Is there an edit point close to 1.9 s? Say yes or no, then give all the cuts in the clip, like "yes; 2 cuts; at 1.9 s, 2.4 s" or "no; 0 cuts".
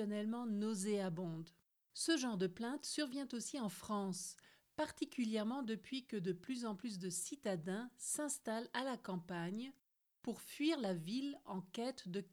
yes; 1 cut; at 1.9 s